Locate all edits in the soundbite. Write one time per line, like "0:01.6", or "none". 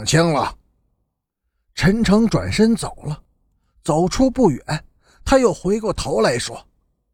none